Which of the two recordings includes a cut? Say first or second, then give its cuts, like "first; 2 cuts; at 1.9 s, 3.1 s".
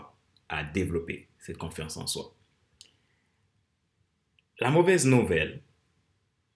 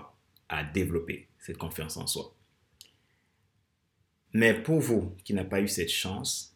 second; 1 cut; at 4.3 s